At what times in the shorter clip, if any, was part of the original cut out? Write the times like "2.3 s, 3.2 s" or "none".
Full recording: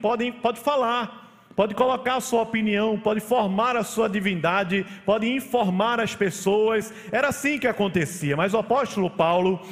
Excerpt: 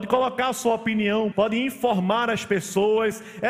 1.3 s